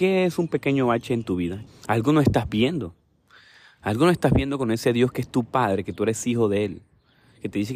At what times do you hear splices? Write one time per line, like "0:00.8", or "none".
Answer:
0:01.7